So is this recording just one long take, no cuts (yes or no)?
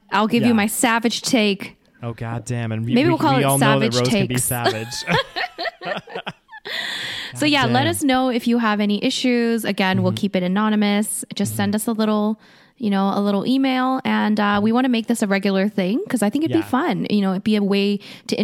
yes